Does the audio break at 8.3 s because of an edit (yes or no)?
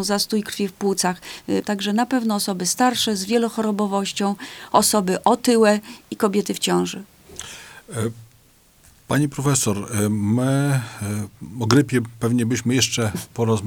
no